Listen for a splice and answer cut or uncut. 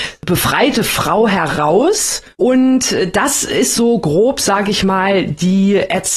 cut